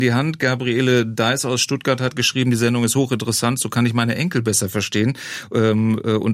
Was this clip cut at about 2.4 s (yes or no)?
no